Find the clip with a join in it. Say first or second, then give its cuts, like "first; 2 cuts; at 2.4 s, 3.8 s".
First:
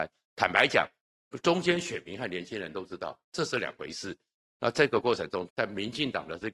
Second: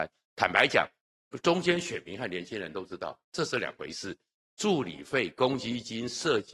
first; 2 cuts; at 4.5 s, 5.5 s